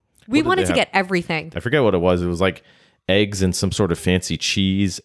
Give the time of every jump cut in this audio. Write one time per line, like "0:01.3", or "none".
0:01.5